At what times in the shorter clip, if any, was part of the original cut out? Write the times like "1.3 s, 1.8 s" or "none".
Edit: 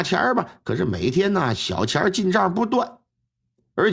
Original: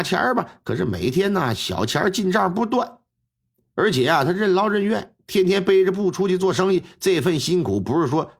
none

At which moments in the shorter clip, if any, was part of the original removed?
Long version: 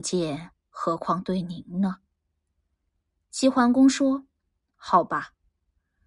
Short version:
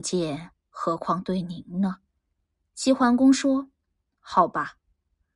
2.1 s

